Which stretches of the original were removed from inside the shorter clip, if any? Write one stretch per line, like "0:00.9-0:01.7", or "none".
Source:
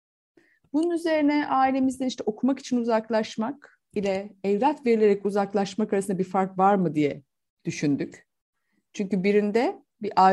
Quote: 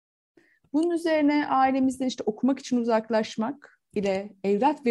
none